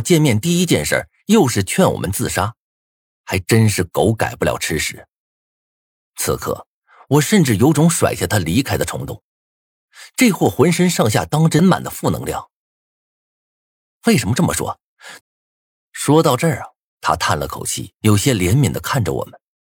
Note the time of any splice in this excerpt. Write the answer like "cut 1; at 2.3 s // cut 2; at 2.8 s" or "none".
cut 1; at 11.6 s // cut 2; at 15.2 s // cut 3; at 18.0 s